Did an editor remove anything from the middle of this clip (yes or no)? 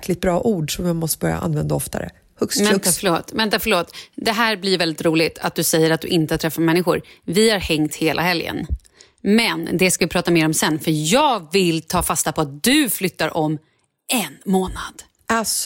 no